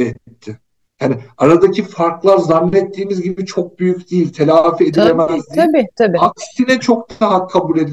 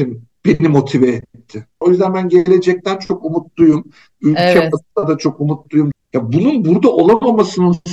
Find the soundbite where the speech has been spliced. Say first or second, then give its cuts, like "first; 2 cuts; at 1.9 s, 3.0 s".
second; 2 cuts; at 1.8 s, 5.9 s